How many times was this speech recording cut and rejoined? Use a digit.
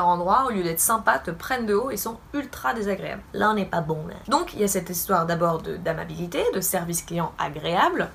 1